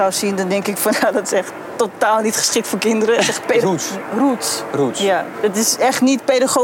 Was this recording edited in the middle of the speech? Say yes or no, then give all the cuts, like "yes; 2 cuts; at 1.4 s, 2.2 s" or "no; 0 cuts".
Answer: yes; 2 cuts; at 3.6 s, 5.3 s